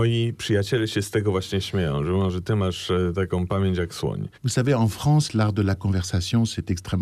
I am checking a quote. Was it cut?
yes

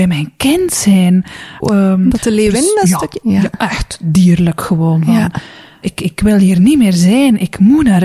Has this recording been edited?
yes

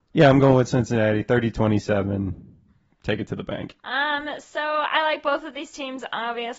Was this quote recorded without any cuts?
no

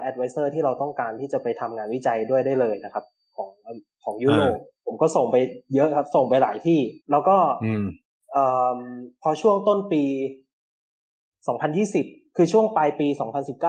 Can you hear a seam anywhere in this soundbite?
yes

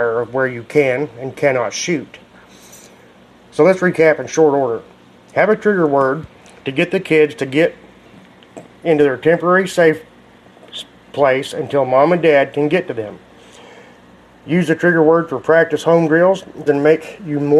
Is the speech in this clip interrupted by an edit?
yes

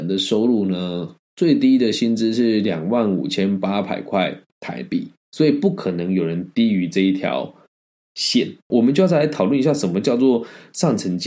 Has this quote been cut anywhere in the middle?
yes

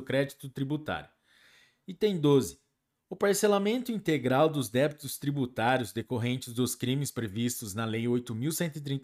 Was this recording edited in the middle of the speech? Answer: no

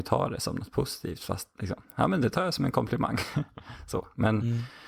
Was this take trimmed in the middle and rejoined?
no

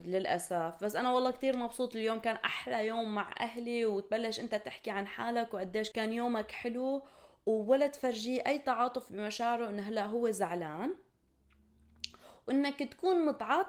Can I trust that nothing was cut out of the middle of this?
no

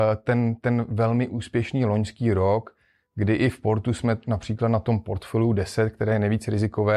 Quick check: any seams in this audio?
no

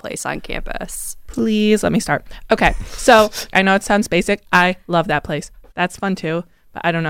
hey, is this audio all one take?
no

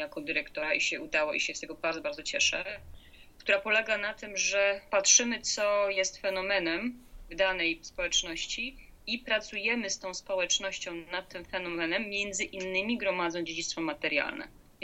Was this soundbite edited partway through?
yes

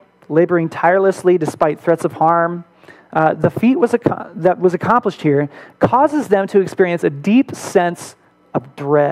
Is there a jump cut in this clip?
no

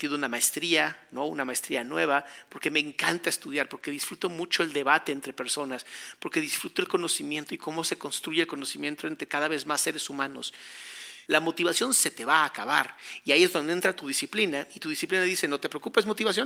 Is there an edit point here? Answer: yes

